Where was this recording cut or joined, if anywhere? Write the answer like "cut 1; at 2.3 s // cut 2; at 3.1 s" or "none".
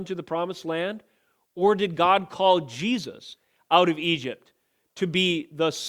none